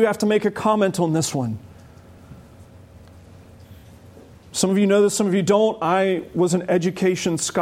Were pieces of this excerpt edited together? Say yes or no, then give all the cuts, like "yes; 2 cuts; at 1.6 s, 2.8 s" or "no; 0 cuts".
no; 0 cuts